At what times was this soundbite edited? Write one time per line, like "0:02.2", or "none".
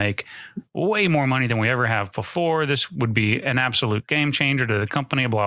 none